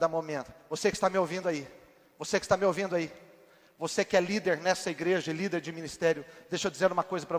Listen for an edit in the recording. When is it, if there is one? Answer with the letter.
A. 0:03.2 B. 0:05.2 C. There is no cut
C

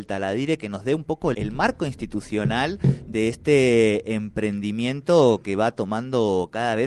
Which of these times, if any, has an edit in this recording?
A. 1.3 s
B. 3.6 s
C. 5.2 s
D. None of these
A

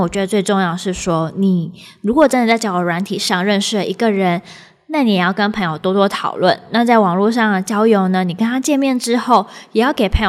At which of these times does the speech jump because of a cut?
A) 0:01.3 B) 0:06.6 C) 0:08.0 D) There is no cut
D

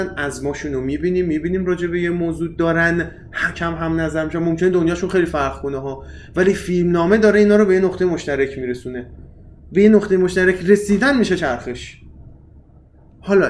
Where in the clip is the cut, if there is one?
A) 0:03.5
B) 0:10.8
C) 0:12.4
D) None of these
A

